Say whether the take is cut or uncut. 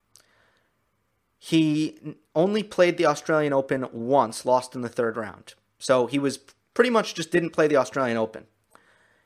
uncut